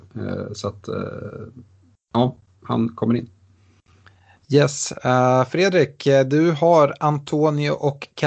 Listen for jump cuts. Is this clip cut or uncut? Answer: uncut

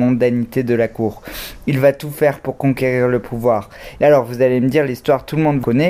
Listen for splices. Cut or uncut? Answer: cut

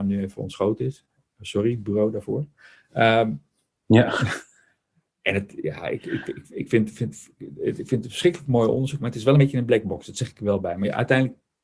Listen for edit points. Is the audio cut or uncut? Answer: uncut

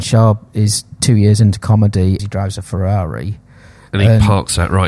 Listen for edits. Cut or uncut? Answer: cut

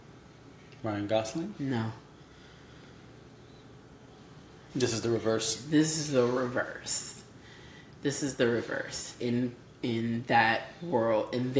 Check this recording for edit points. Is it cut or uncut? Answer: cut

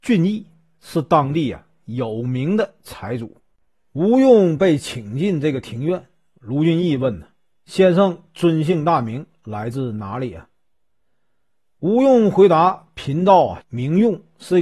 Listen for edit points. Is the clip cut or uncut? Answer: cut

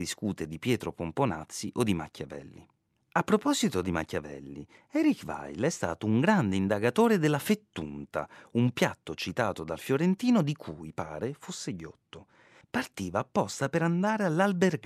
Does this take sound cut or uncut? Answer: uncut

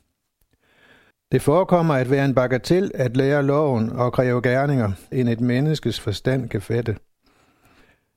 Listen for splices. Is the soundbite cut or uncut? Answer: cut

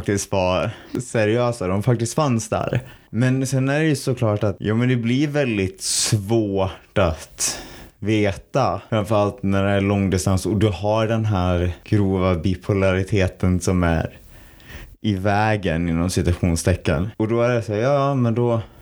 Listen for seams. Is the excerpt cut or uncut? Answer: uncut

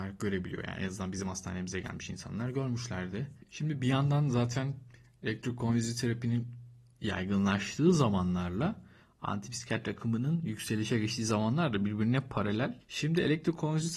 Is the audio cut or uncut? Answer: cut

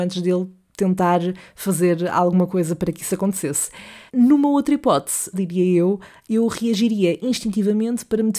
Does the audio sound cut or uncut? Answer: cut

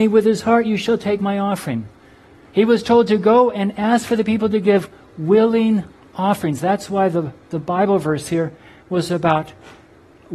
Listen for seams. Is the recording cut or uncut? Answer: uncut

